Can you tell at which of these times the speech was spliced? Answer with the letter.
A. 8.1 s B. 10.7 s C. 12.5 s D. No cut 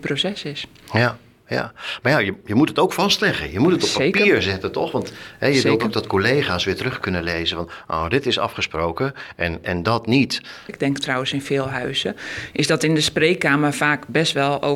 B